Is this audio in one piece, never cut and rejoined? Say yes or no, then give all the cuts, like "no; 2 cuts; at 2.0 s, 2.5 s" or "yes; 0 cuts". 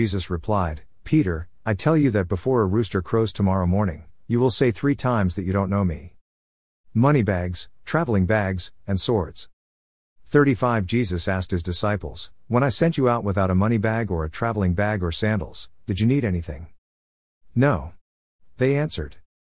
yes; 0 cuts